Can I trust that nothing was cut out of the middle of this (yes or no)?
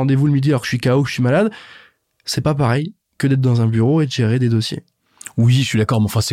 yes